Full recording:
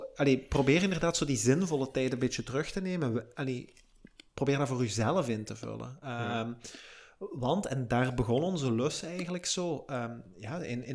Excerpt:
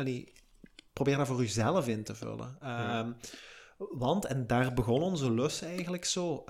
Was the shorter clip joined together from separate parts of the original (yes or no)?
no